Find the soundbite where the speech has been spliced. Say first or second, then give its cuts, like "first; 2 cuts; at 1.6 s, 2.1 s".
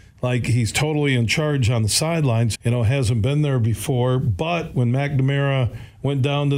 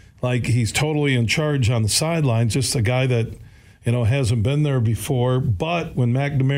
first; 1 cut; at 2.5 s